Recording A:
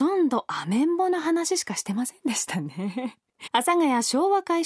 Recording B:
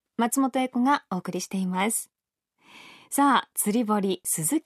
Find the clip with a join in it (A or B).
A